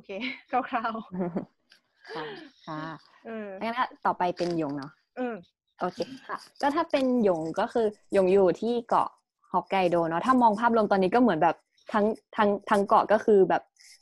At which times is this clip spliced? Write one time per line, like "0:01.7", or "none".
none